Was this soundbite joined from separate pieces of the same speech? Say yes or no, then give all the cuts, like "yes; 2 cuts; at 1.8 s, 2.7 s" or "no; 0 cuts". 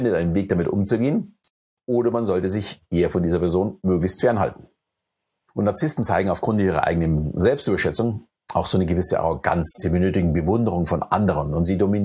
no; 0 cuts